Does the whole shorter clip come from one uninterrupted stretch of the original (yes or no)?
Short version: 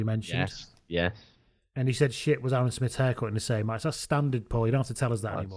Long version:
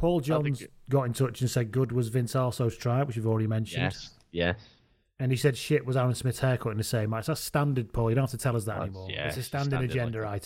yes